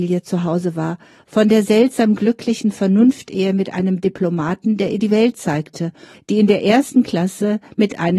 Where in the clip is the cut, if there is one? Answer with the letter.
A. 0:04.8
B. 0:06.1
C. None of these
B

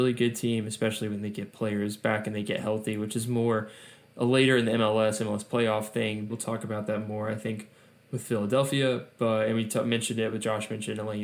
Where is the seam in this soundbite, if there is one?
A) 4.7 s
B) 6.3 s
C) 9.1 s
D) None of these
B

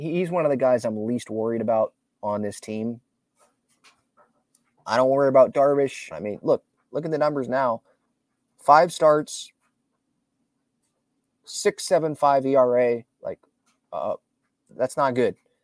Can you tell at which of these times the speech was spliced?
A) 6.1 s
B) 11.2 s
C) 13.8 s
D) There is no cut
A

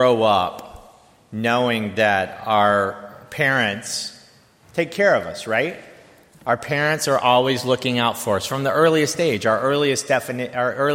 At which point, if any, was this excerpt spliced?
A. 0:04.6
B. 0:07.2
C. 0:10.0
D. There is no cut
D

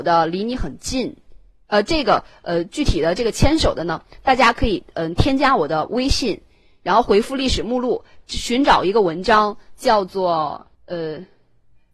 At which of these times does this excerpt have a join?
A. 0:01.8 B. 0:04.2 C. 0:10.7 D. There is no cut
C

